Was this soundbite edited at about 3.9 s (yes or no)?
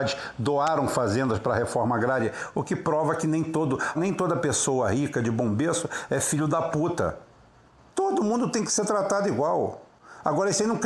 yes